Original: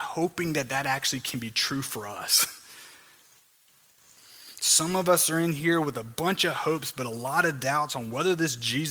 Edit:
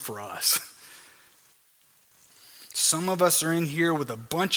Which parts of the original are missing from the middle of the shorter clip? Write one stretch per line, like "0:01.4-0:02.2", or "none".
none